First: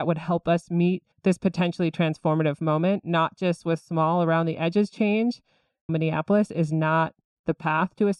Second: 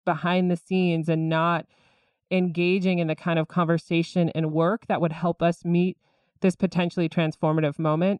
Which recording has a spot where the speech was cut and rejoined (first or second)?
first